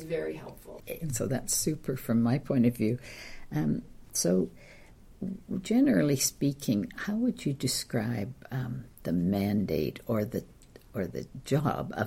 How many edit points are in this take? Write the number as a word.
one